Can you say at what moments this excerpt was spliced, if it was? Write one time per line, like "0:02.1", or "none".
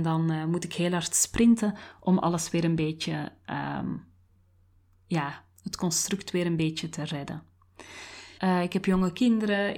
0:08.4

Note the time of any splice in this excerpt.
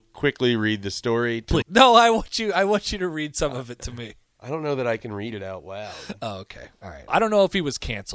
0:01.6
0:07.1

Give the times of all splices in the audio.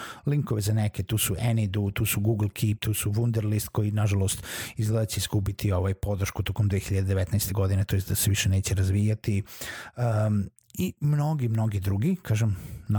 none

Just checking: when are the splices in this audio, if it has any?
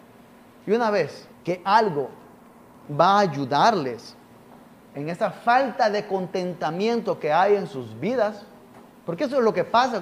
0:01.3

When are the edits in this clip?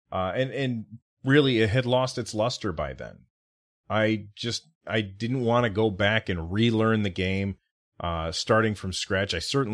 none

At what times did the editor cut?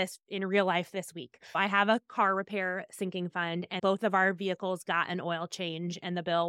0:03.8

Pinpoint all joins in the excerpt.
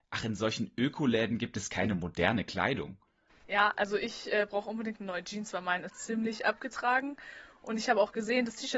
0:03.3
0:05.9

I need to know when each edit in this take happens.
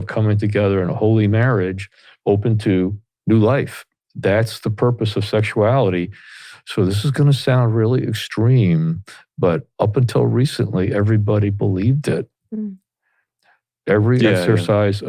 none

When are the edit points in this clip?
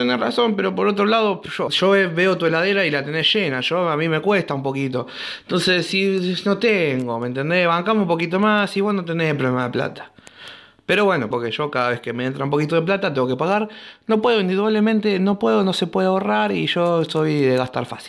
0:01.7
0:11.3

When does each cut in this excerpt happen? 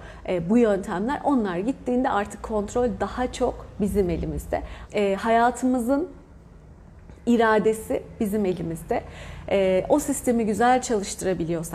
0:04.9

